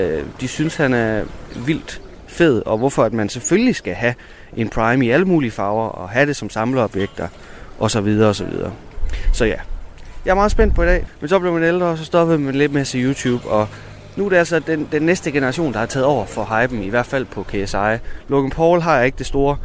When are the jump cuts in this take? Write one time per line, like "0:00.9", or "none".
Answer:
0:11.1